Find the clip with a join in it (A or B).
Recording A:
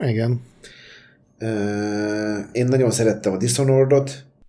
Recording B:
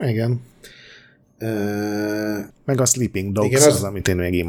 B